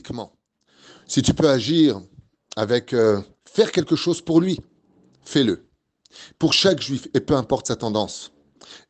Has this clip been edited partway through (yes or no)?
yes